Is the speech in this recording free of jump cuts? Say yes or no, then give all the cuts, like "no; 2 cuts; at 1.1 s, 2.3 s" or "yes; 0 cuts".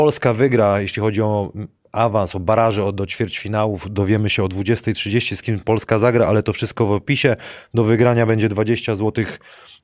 yes; 0 cuts